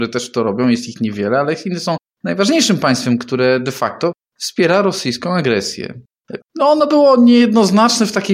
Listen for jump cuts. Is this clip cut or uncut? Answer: cut